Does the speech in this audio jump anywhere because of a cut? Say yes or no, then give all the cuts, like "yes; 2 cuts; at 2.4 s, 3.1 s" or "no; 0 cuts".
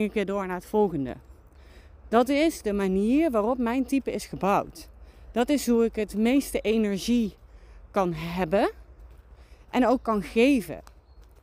no; 0 cuts